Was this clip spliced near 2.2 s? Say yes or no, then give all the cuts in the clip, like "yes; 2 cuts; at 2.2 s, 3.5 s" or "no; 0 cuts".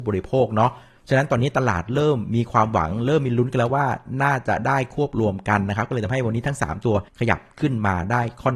no; 1 cut; at 7.1 s